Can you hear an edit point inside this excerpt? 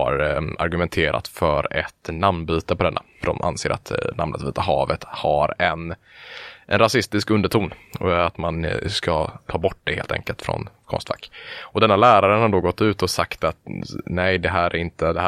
no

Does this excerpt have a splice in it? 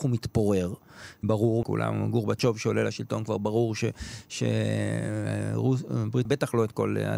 yes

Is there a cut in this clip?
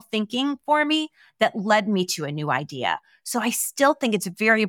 no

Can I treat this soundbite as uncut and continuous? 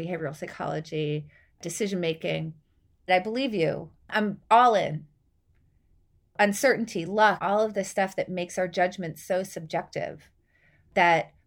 no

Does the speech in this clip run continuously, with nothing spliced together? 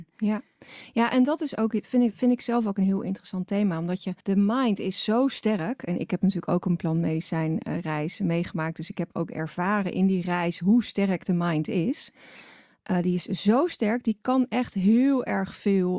no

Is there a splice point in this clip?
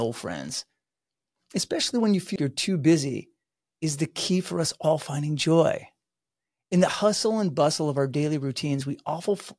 yes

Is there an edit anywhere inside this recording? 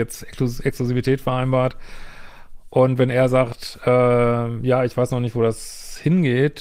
no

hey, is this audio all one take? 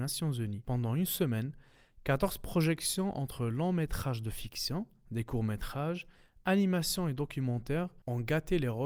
yes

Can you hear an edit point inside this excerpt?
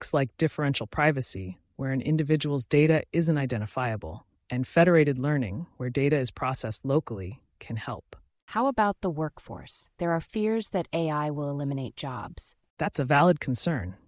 no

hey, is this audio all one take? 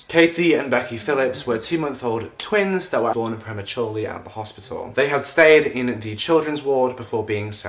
no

